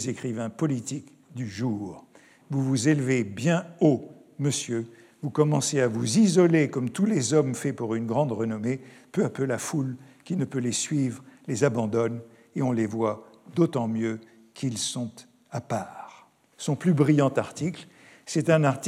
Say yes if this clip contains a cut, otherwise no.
yes